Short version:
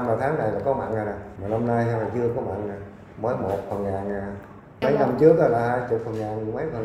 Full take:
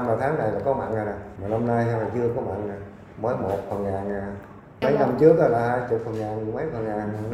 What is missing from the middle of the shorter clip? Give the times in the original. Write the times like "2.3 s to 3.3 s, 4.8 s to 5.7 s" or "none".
none